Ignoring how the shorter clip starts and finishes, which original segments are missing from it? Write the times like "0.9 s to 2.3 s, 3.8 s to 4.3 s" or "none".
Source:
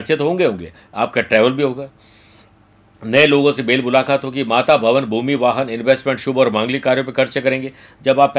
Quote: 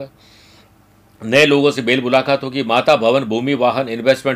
none